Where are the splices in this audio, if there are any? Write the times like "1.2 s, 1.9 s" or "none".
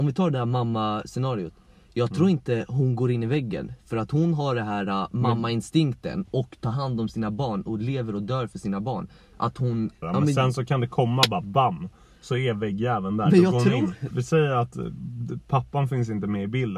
10.0 s, 14.1 s